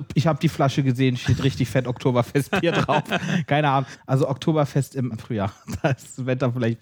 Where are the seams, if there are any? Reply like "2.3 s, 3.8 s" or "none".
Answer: 3.9 s, 5.1 s